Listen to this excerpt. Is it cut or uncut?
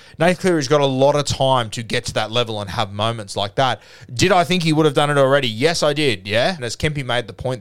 cut